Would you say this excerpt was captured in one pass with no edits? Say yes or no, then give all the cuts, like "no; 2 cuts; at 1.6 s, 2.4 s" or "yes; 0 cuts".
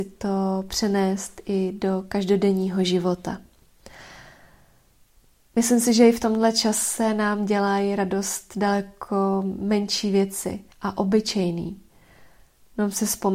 no; 2 cuts; at 5.5 s, 10.7 s